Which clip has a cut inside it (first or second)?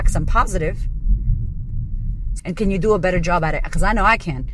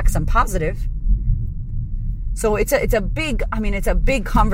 first